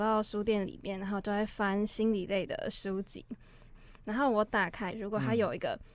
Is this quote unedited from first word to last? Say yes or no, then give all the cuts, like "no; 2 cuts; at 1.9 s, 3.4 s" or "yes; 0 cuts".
no; 2 cuts; at 3.7 s, 4.9 s